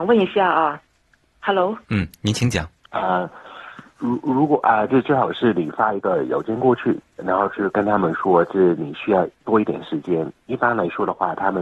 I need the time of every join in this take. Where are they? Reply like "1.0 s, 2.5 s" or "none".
2.8 s